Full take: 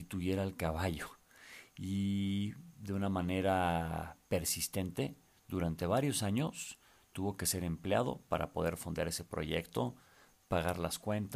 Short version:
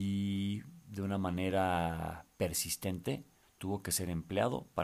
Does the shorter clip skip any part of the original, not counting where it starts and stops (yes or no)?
yes